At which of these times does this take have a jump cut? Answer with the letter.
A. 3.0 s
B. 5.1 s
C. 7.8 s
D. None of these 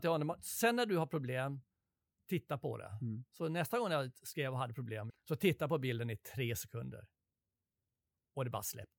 B